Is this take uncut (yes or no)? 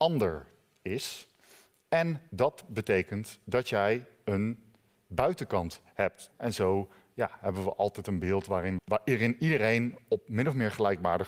no